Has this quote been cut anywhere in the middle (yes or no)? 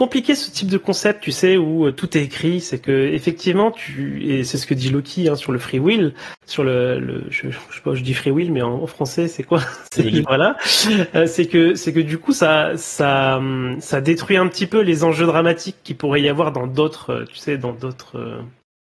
yes